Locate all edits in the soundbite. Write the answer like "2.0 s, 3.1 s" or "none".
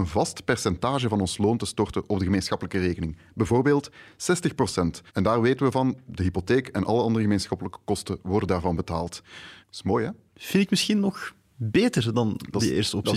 5.1 s, 9.6 s